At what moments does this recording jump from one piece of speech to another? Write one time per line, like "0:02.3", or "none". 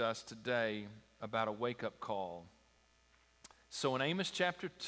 none